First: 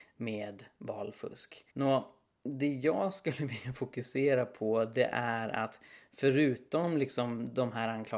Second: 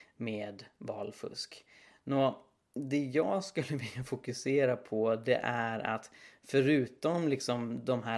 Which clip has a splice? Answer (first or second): first